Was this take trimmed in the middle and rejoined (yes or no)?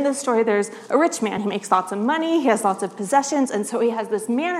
no